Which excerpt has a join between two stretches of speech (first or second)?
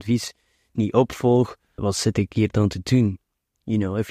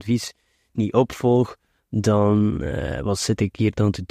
first